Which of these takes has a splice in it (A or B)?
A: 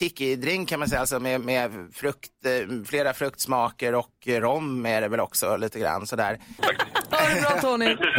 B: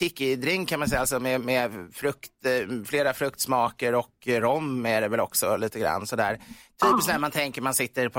A